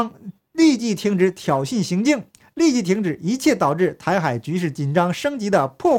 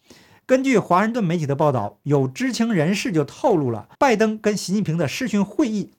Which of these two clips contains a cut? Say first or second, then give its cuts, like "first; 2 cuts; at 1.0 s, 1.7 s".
second; 1 cut; at 3.9 s